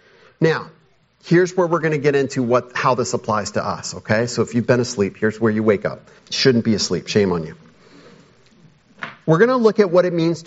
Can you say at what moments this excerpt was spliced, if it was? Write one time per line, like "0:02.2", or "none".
0:06.2

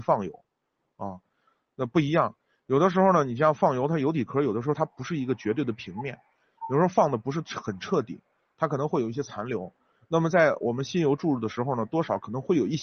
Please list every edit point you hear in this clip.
none

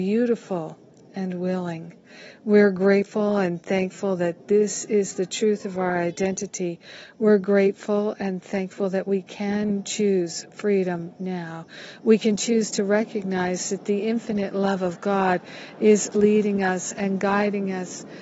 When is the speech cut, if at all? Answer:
0:16.1

